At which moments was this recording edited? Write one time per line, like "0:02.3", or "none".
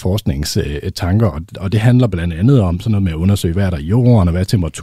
none

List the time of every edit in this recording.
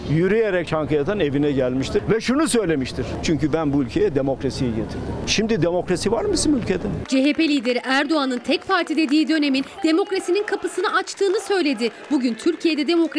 0:03.2

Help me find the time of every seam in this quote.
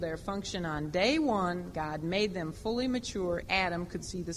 0:03.4

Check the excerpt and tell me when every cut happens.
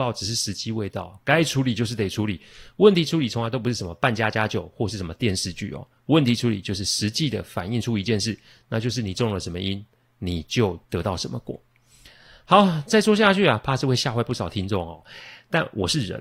0:10.8

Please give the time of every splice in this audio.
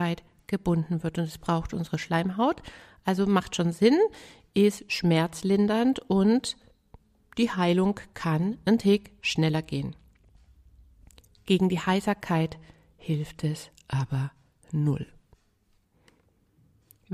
none

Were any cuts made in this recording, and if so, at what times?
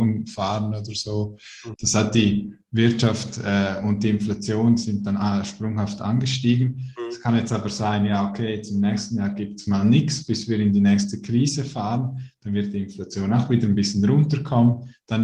0:01.7

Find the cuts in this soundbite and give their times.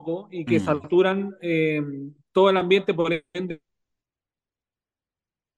none

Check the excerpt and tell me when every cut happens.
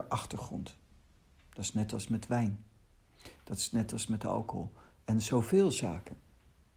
none

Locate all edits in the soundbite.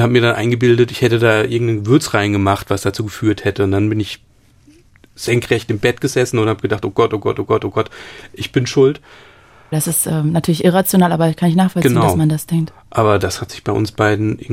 0:09.7

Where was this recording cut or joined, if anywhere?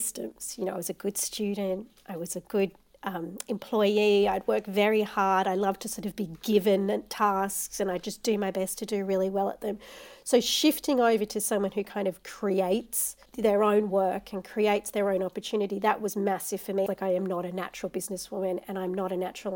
0:16.9

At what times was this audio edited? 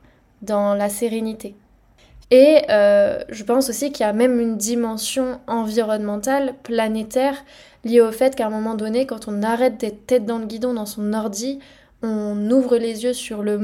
0:02.2

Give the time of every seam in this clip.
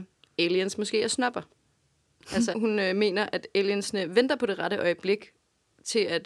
0:02.5

